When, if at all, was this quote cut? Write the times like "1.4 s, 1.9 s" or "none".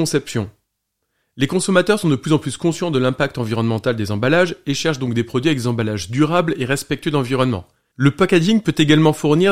7.9 s